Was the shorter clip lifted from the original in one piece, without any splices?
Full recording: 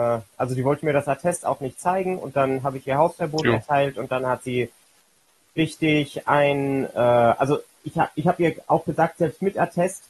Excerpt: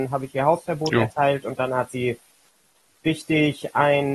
yes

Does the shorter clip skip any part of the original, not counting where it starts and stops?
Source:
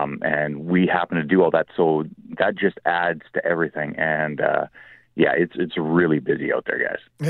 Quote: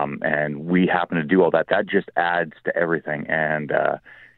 yes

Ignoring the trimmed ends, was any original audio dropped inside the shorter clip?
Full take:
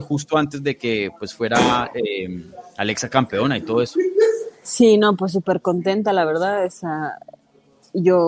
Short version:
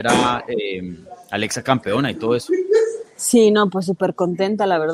no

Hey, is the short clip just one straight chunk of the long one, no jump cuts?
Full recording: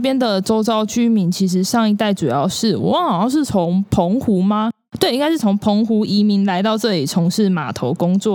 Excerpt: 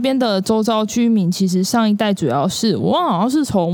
yes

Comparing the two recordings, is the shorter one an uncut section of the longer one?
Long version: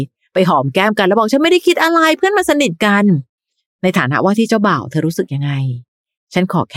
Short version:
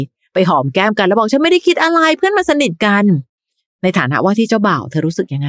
yes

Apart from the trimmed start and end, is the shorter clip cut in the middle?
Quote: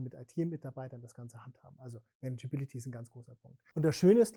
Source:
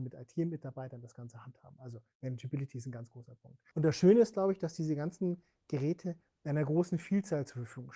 no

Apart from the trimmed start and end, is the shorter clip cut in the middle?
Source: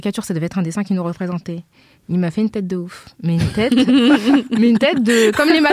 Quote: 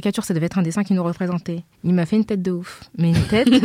yes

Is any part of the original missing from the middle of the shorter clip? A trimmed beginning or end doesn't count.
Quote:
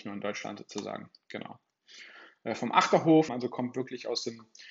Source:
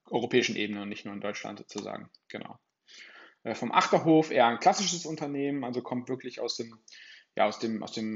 yes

